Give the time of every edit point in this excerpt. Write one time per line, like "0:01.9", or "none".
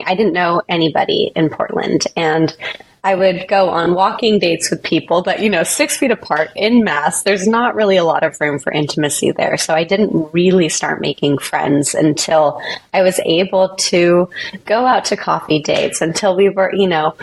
none